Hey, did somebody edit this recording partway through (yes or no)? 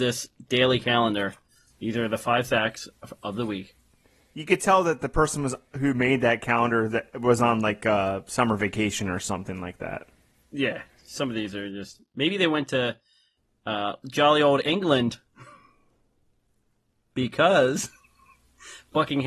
no